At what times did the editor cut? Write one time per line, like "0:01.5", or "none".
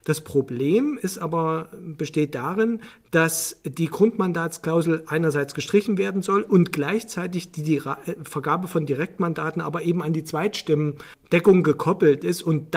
none